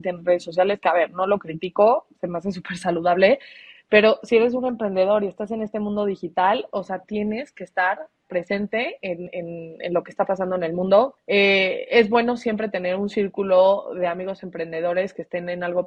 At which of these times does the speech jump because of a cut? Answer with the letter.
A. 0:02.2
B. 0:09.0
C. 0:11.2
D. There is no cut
C